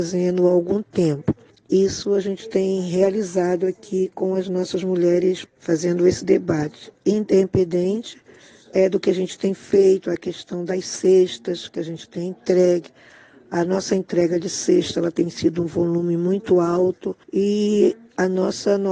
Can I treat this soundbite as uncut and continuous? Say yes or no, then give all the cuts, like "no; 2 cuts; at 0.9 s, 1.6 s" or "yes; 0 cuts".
no; 2 cuts; at 5.4 s, 17.2 s